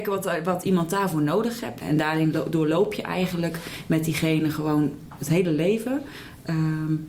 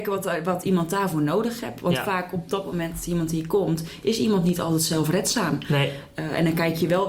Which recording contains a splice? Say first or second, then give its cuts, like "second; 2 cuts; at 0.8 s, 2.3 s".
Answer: first; 1 cut; at 1.8 s